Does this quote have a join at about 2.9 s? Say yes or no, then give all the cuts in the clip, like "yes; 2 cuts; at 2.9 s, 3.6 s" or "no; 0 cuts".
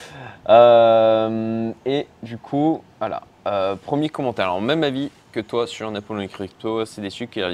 yes; 1 cut; at 2.9 s